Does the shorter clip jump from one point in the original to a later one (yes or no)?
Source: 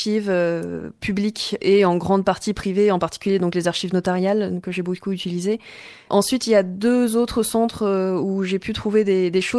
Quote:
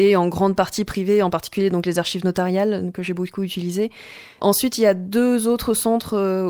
no